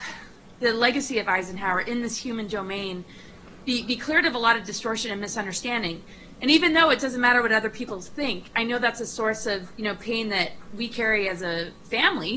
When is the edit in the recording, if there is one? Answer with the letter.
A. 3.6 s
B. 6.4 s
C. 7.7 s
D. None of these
D